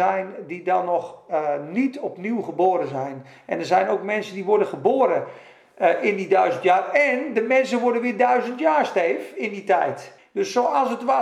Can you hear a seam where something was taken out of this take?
yes; 1 cut; at 10.2 s

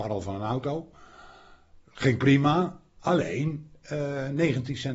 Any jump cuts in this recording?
no; 0 cuts

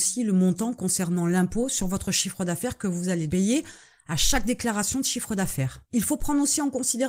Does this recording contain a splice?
yes; 1 cut; at 3.3 s

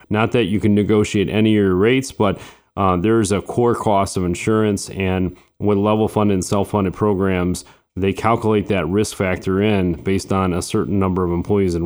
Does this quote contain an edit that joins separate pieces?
no; 0 cuts

